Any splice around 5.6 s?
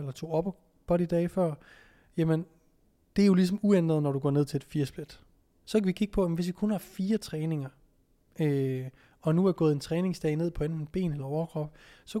yes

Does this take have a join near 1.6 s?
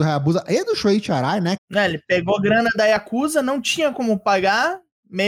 yes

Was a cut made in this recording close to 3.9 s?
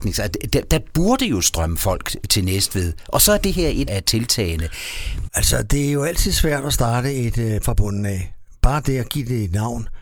yes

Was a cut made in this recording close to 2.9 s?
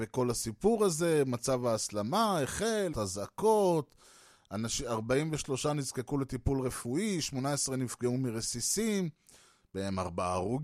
yes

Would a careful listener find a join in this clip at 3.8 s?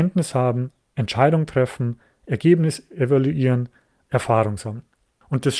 no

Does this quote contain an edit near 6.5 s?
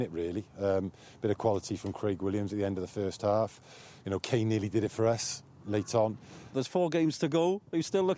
yes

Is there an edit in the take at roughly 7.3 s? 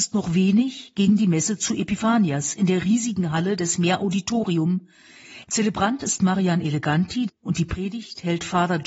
yes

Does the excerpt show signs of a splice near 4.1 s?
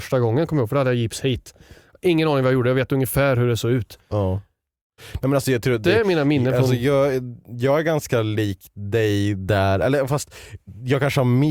no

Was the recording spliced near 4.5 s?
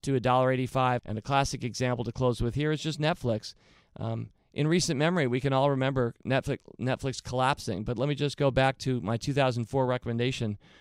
no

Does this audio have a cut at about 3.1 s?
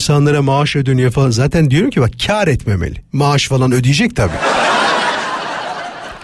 no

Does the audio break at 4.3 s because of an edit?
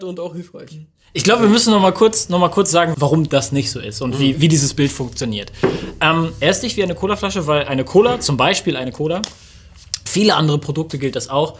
yes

